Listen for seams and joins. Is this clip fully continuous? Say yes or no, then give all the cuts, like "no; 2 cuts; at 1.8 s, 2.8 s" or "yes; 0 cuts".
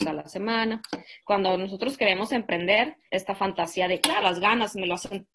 no; 3 cuts; at 1.2 s, 3.1 s, 4.2 s